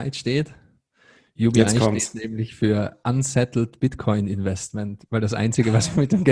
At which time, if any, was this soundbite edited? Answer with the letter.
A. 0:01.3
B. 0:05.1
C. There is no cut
C